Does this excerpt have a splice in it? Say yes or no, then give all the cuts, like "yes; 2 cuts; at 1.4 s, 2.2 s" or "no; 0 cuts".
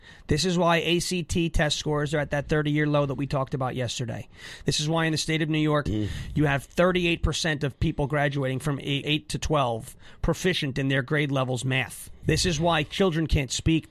yes; 3 cuts; at 5.9 s, 9.0 s, 12.2 s